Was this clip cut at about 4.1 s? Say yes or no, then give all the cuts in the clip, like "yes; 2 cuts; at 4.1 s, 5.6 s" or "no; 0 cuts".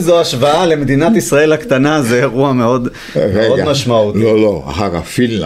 no; 0 cuts